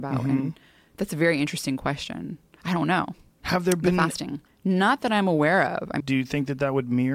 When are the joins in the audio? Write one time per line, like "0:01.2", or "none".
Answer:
0:03.3
0:04.5
0:06.0

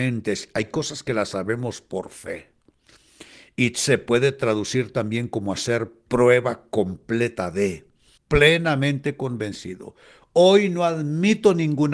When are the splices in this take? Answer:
0:08.2

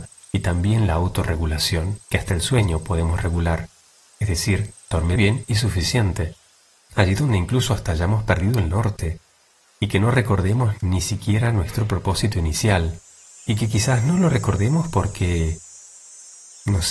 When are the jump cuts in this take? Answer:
0:02.0
0:05.2
0:06.8

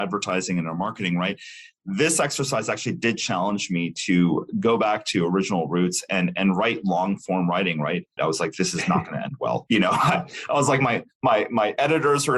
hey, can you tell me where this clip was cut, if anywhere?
0:08.2

